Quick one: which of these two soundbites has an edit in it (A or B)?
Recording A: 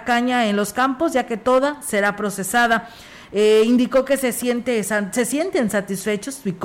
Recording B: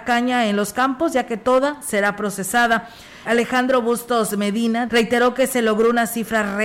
B